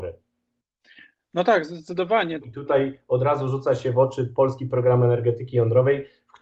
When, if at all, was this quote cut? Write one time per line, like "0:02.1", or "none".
0:02.4